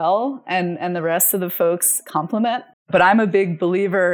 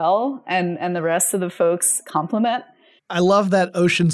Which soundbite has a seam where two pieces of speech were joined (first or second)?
first